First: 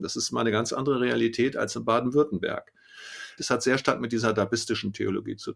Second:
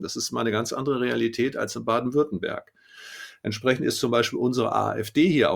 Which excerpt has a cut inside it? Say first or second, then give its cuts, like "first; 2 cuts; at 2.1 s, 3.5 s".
first; 1 cut; at 3.4 s